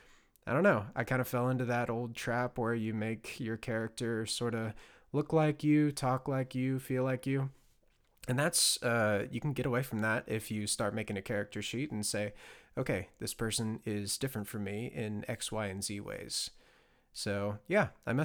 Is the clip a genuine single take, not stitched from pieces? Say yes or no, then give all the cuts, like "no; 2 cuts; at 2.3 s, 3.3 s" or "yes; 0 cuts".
yes; 0 cuts